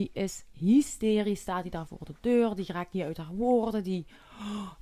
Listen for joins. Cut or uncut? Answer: uncut